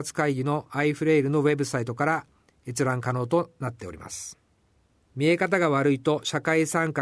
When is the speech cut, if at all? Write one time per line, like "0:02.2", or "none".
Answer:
0:05.0